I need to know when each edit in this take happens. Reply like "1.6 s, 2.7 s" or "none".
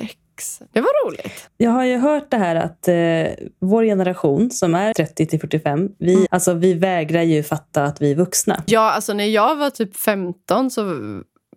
4.9 s, 6.3 s, 8.7 s

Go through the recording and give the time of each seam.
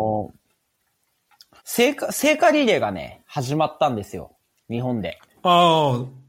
1.6 s

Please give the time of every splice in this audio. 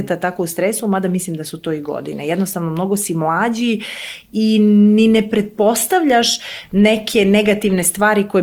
none

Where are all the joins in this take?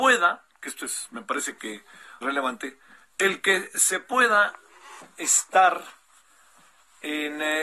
2.2 s

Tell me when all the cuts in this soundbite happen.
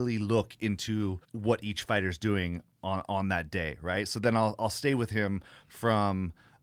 1.2 s

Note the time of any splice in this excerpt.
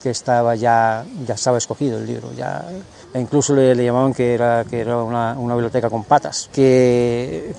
3.0 s, 6.5 s

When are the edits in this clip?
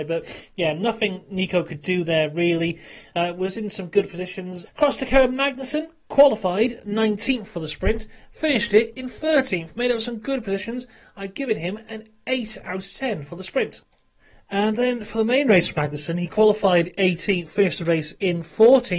4.7 s

